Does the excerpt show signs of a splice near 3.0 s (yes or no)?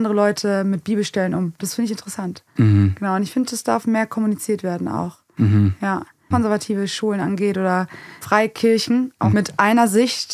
no